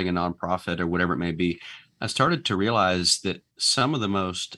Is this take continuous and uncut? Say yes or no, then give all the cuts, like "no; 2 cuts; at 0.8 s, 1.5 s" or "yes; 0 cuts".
no; 1 cut; at 3.5 s